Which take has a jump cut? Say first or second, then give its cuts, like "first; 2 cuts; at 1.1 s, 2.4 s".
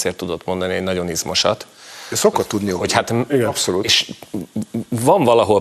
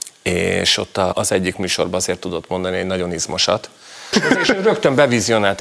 second; 2 cuts; at 1.1 s, 4.1 s